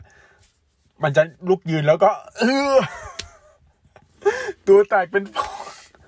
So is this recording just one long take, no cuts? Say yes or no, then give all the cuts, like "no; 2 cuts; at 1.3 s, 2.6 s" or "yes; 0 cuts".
yes; 0 cuts